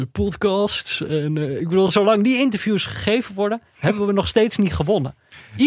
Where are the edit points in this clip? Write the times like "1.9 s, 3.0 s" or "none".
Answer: none